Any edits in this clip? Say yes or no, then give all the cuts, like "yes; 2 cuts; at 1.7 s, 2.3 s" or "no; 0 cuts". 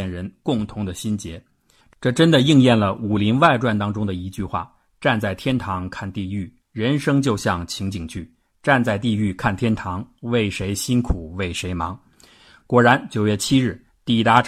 yes; 1 cut; at 1.8 s